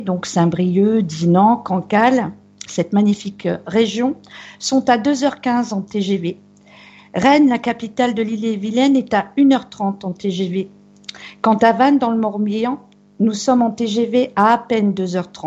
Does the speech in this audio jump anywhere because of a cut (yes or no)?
no